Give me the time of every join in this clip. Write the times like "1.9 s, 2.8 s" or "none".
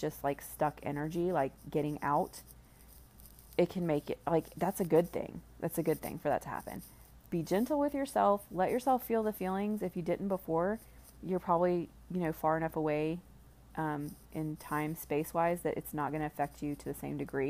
none